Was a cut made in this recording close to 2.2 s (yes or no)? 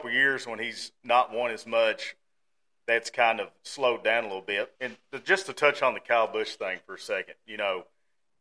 no